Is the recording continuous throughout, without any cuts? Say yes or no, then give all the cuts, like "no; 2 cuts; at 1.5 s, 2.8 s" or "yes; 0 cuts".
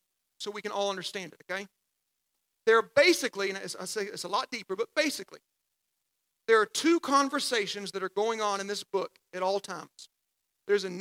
yes; 0 cuts